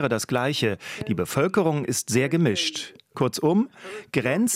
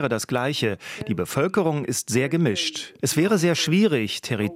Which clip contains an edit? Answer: second; 1 cut; at 3.0 s

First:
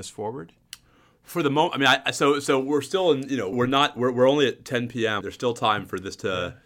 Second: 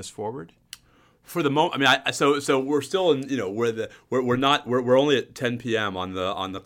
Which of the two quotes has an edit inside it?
first; 2 cuts; at 3.5 s, 5.2 s

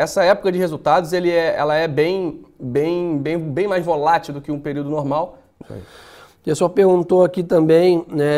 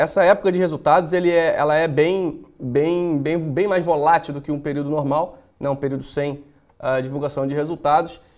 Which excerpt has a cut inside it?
first; 1 cut; at 5.6 s

